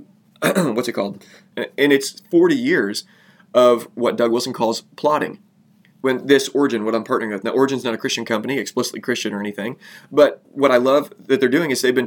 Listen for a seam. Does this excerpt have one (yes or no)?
yes